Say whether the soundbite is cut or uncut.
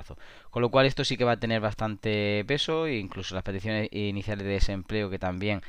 uncut